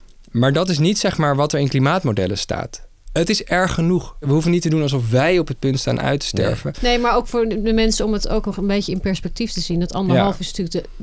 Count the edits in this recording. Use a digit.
1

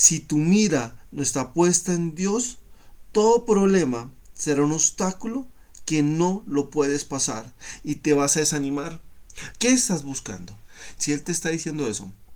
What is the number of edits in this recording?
2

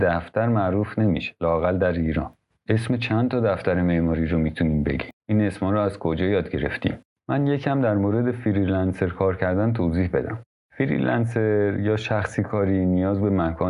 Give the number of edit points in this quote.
1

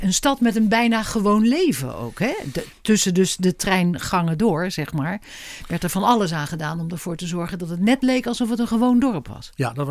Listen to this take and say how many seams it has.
0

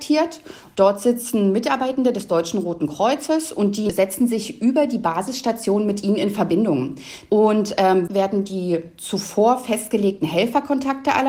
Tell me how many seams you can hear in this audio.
1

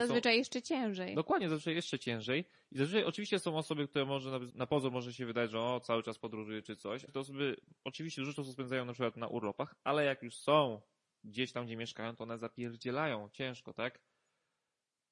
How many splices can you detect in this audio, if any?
2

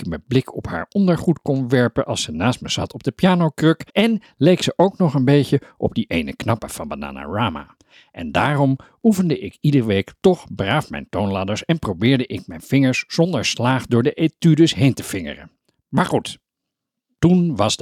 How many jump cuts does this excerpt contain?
1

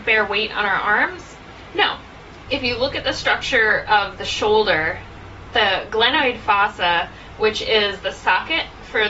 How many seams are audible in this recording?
1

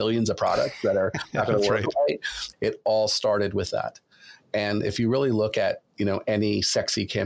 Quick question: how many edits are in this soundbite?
1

